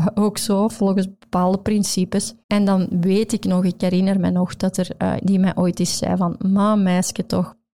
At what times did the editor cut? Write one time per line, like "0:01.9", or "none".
0:02.4
0:05.2